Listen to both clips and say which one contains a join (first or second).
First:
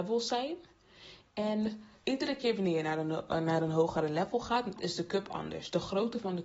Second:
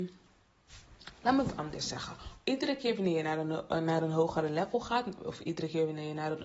first